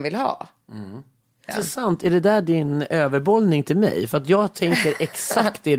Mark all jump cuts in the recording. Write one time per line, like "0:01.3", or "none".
0:01.5